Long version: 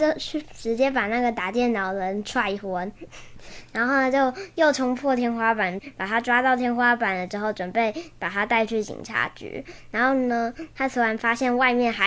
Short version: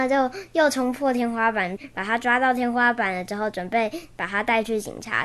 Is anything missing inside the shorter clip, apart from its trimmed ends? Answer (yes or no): no